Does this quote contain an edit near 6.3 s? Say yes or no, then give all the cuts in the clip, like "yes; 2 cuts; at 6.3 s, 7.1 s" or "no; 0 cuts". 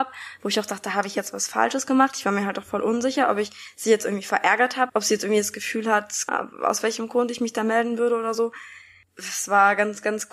yes; 2 cuts; at 4.9 s, 6.3 s